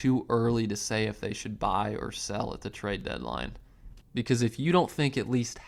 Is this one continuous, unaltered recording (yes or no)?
no